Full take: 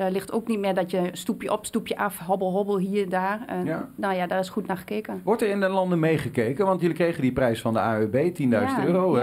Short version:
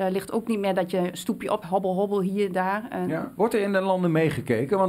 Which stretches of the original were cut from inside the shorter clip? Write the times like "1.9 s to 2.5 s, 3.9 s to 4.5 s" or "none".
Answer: 1.6 s to 2.2 s, 3.9 s to 5.2 s